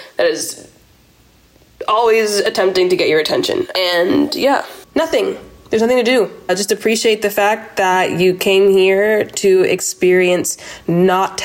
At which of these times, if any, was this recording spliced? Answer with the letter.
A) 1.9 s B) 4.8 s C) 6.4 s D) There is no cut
B